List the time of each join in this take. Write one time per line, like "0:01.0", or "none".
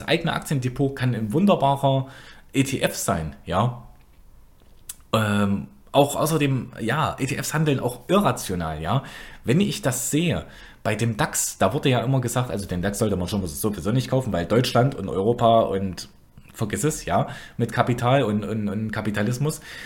none